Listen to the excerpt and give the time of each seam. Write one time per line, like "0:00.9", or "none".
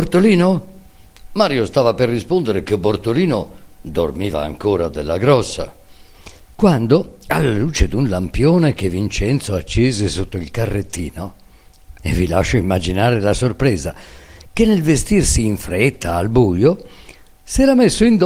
0:01.3
0:12.0